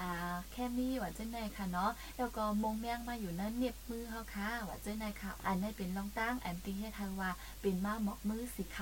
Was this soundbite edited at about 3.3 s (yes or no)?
no